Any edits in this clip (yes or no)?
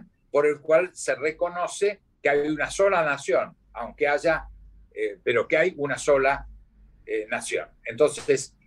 yes